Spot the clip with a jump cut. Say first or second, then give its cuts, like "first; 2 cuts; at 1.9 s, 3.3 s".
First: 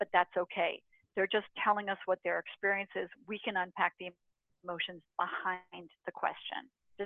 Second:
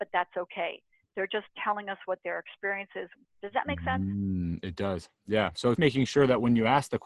second; 2 cuts; at 3.2 s, 5.8 s